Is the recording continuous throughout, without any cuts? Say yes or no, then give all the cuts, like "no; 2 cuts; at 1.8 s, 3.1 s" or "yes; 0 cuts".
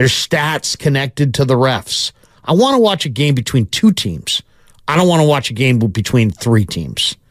yes; 0 cuts